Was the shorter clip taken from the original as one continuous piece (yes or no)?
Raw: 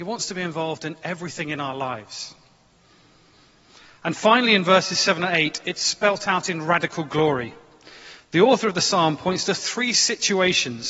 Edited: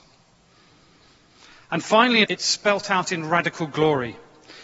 no